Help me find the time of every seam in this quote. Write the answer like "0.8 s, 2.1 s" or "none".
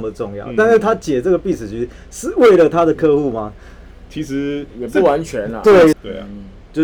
5.9 s